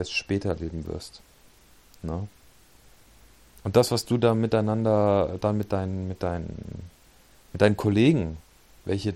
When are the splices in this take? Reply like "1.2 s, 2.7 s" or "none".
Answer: none